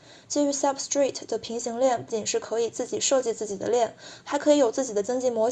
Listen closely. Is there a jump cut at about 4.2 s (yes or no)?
no